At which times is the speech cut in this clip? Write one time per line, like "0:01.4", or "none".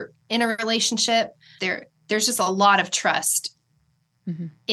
0:01.6